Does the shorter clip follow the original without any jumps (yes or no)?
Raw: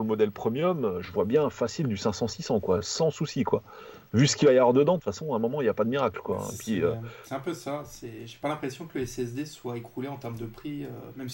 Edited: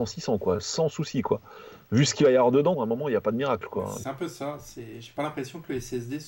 no